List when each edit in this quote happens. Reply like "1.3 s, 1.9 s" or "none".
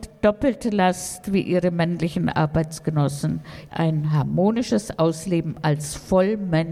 3.7 s